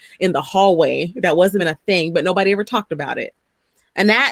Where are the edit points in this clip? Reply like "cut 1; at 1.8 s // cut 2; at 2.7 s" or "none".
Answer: cut 1; at 1.6 s